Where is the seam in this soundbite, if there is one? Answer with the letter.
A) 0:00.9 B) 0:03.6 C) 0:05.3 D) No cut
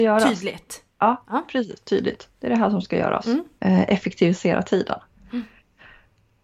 B